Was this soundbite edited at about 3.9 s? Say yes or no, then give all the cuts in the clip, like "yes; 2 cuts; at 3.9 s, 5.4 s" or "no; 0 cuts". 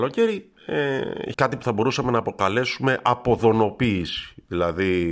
no; 1 cut; at 1.3 s